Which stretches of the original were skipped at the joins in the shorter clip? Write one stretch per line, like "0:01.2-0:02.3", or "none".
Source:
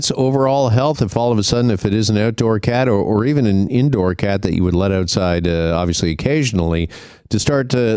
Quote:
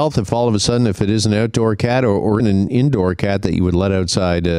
0:03.2-0:03.4